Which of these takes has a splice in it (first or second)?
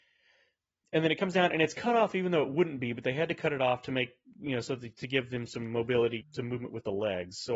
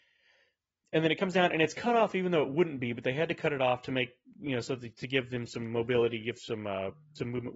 first